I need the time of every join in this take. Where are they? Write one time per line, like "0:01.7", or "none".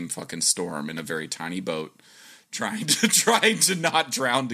none